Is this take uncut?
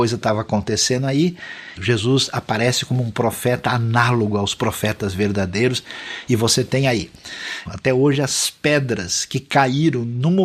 no; 2 cuts; at 1.8 s, 7.7 s

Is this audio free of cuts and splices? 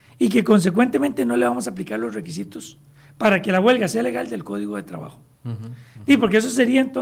yes; 0 cuts

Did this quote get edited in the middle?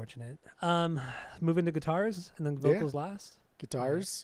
no; 0 cuts

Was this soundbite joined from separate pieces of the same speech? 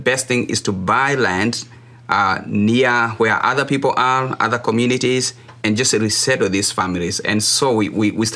no; 0 cuts

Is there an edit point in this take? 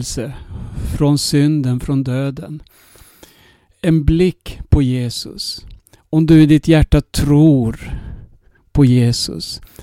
no; 0 cuts

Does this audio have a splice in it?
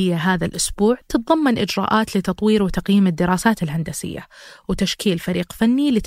no; 0 cuts

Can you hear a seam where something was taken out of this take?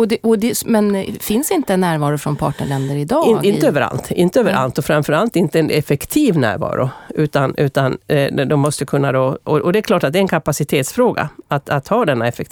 no; 0 cuts

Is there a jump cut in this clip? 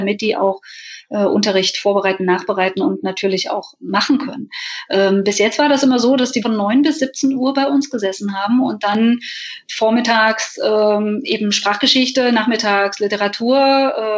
yes; 1 cut; at 6.4 s

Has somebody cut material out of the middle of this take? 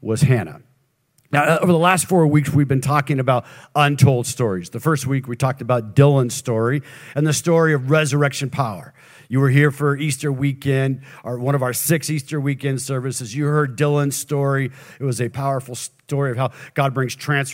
yes; 1 cut; at 15.3 s

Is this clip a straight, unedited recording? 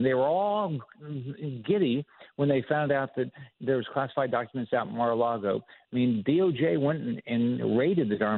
yes; 0 cuts

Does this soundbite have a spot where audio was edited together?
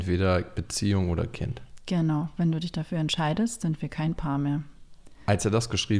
no; 0 cuts

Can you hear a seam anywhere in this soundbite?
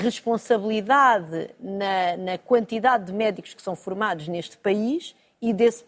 no; 0 cuts

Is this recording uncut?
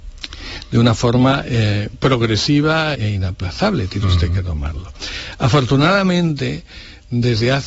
no; 1 cut; at 2.9 s

